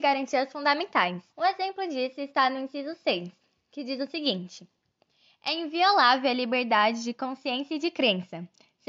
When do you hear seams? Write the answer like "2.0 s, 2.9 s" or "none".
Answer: 1.3 s

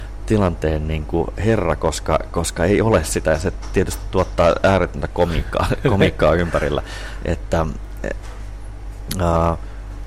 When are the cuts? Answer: none

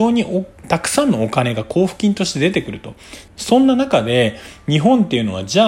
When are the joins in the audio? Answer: 3.3 s

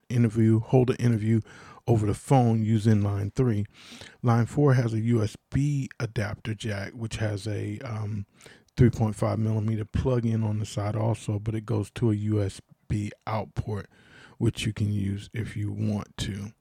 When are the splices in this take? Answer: none

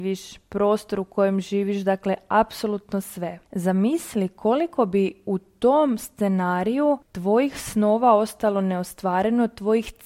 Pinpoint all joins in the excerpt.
3.4 s, 7.0 s

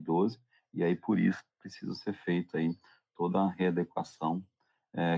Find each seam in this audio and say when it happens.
none

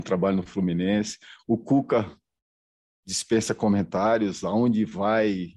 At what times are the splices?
none

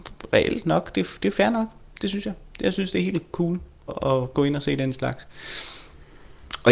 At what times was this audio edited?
3.9 s

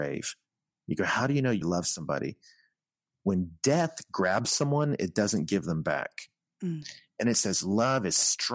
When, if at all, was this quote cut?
1.6 s

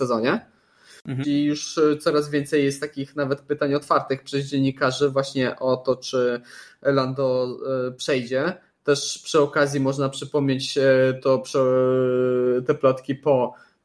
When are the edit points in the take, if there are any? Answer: 1.2 s

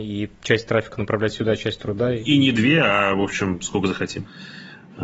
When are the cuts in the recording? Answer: none

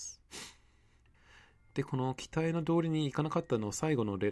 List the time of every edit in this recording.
none

